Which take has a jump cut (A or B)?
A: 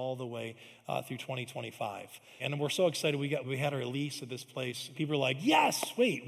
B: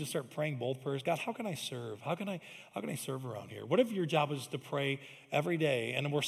A